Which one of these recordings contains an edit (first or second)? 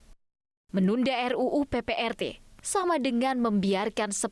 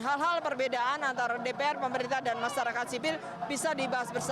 first